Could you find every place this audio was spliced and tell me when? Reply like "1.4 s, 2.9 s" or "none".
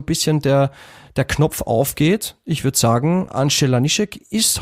3.3 s